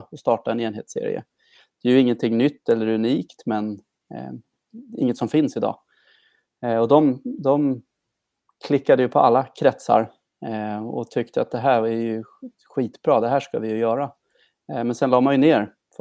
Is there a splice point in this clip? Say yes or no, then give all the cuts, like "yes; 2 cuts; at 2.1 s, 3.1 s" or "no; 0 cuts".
no; 0 cuts